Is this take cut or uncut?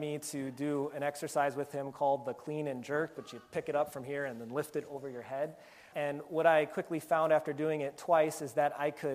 cut